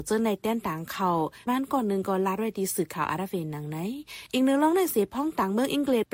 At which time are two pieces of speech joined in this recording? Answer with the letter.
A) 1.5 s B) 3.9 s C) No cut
A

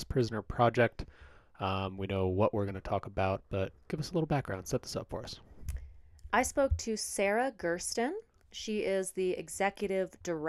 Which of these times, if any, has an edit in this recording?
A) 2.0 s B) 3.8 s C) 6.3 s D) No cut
B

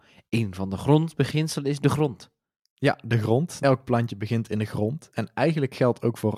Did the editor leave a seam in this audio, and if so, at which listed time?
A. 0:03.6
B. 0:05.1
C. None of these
A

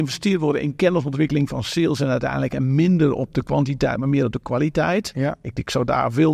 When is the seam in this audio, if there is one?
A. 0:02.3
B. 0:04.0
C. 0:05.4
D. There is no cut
D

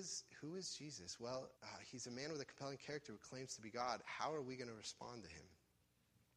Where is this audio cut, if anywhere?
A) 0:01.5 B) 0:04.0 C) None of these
A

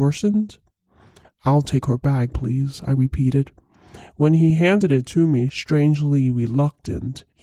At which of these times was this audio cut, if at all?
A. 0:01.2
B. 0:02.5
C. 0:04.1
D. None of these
A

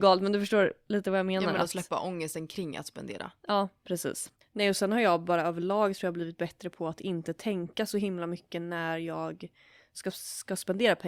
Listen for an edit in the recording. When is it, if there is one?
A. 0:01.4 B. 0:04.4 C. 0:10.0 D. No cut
B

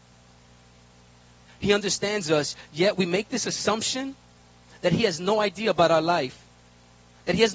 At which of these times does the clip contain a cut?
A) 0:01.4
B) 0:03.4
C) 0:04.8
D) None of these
A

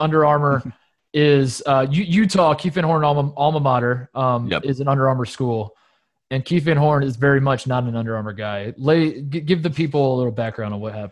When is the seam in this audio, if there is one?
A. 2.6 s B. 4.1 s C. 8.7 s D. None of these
D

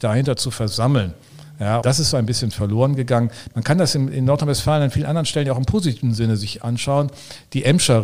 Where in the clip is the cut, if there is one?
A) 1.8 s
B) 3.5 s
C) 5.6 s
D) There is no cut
A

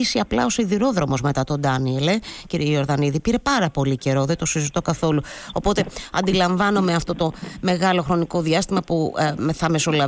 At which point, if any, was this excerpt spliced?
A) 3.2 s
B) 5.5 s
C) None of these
C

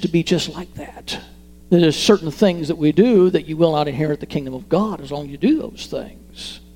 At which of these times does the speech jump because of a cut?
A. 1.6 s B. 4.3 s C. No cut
A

